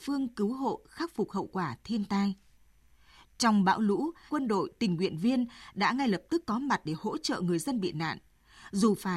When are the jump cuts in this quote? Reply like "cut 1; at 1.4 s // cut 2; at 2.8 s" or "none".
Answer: cut 1; at 4.3 s